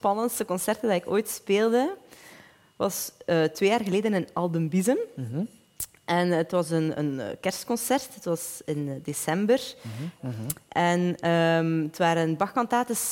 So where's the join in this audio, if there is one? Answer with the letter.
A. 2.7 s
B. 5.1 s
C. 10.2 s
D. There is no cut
C